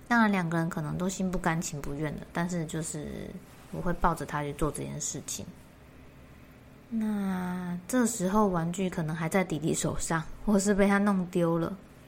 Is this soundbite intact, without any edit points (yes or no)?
yes